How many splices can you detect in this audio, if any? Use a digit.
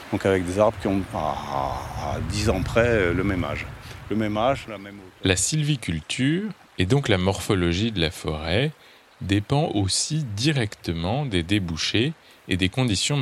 1